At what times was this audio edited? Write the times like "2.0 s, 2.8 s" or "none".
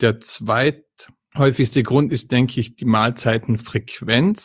none